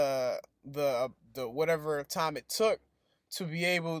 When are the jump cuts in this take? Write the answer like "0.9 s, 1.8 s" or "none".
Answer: none

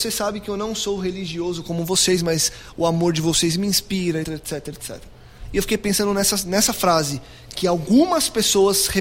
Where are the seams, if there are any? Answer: 4.2 s

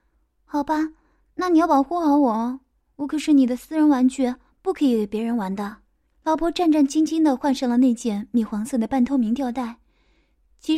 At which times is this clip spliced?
6.1 s

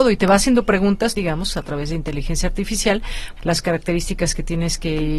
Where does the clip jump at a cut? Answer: 1.1 s, 3.4 s

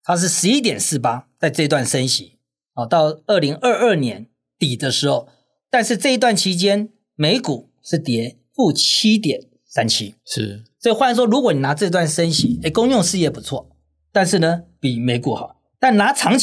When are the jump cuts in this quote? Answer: none

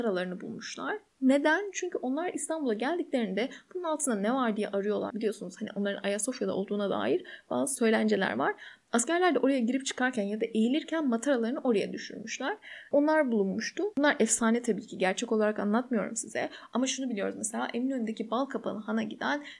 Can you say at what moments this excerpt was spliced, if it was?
5.1 s, 13.9 s

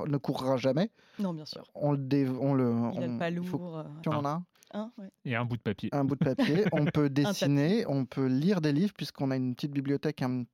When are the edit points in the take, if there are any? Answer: 4.0 s

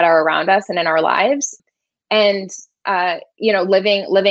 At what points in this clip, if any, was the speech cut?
none

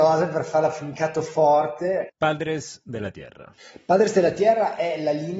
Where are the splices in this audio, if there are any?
2.1 s

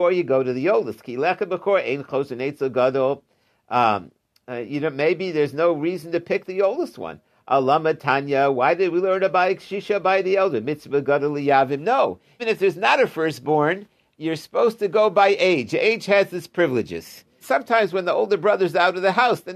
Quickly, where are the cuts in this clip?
12.4 s, 17.4 s

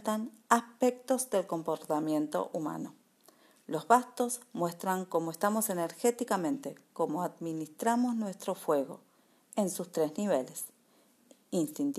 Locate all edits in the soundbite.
none

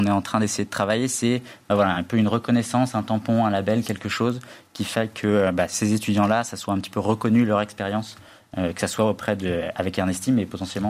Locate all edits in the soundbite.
none

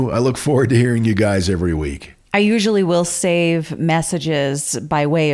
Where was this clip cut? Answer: 2.2 s

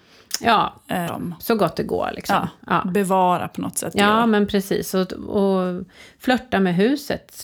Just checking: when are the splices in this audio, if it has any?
1.1 s

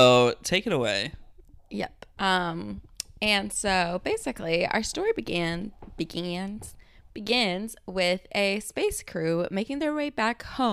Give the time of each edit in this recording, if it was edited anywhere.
2.2 s

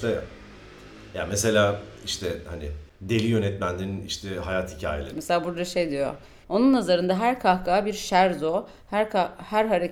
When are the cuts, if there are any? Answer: 5.1 s, 6.4 s

